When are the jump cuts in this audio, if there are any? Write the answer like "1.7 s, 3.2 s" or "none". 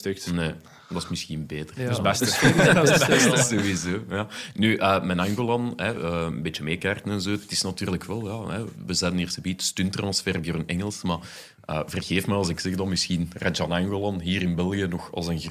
none